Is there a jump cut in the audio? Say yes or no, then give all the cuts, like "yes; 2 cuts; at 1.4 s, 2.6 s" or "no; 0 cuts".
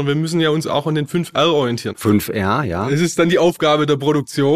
yes; 1 cut; at 1.9 s